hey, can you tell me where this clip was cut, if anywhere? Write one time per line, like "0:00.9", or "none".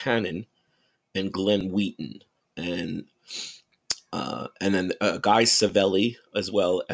none